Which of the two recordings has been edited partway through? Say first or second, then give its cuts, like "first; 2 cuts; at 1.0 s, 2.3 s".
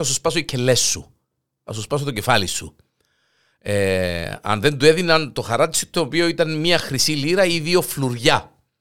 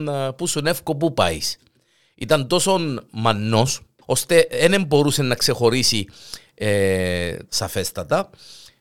second; 2 cuts; at 4.0 s, 7.5 s